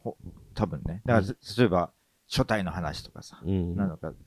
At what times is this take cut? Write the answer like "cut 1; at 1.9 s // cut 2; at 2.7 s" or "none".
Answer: none